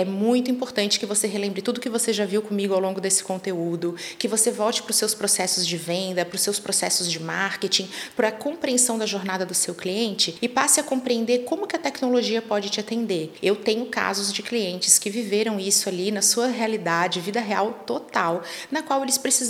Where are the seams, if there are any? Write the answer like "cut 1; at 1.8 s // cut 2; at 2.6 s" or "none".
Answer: none